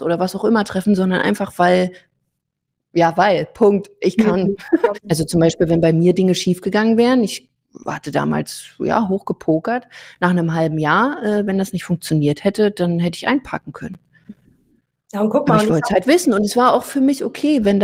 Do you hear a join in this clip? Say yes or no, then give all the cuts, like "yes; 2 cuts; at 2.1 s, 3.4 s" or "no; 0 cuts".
yes; 1 cut; at 4.9 s